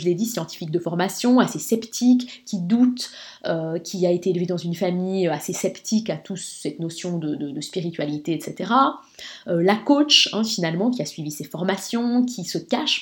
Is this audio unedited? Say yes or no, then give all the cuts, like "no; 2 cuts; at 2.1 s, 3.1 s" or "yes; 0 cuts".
yes; 0 cuts